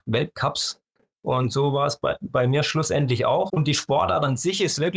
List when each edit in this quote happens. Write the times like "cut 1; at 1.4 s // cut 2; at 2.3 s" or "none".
cut 1; at 1.1 s // cut 2; at 3.5 s